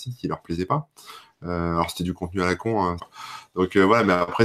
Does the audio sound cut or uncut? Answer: cut